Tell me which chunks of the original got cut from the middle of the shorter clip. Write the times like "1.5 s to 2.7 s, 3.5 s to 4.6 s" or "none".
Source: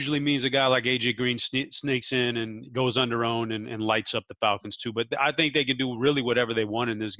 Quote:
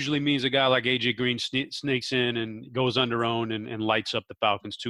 none